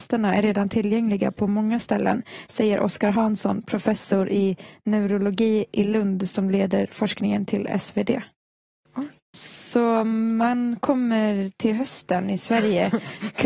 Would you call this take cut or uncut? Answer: uncut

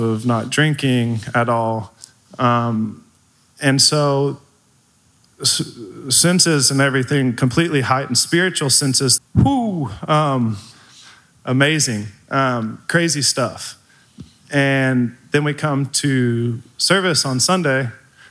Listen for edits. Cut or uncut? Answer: cut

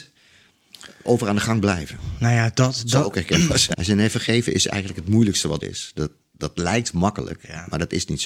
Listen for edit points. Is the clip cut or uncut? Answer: cut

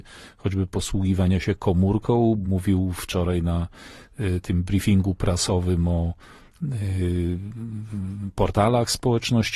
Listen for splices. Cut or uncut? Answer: uncut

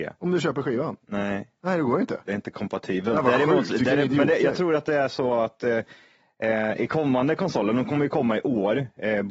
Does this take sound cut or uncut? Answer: uncut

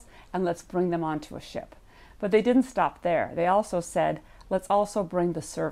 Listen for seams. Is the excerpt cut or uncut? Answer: uncut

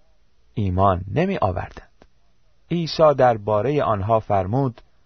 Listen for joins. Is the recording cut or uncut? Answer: uncut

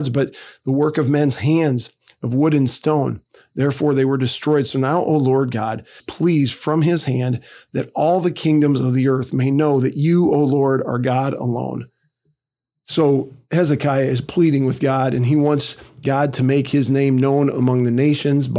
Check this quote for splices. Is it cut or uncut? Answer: cut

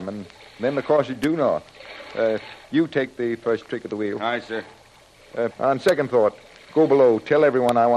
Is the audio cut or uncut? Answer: cut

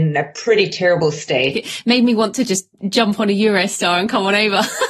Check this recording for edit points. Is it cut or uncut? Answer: cut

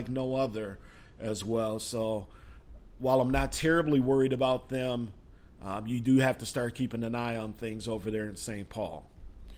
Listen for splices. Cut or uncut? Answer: uncut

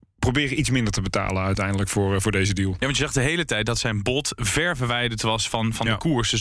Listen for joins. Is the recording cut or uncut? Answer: uncut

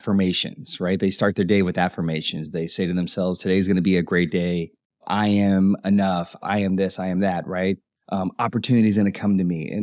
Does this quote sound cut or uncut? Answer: cut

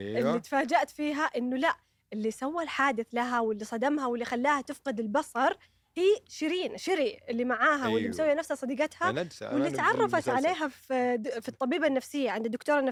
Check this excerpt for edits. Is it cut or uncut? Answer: uncut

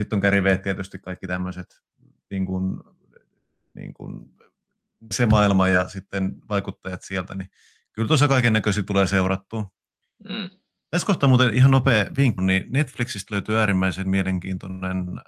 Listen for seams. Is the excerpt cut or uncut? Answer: cut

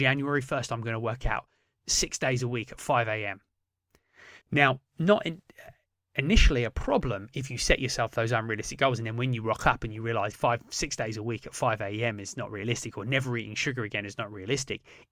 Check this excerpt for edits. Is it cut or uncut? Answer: cut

